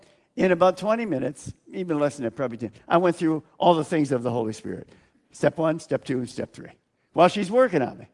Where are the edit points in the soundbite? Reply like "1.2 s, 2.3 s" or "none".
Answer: none